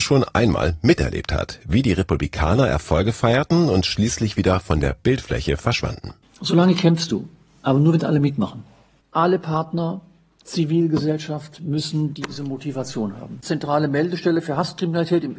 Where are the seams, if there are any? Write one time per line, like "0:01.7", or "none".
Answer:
0:06.2
0:13.4